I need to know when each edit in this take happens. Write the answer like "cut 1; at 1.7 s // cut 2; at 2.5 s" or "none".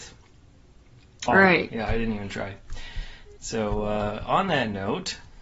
cut 1; at 1.3 s